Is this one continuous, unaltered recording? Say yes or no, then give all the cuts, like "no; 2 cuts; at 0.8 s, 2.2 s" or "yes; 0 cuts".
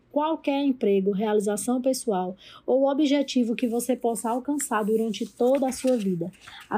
yes; 0 cuts